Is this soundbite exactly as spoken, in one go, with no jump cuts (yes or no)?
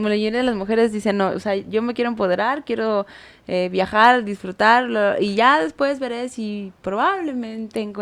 yes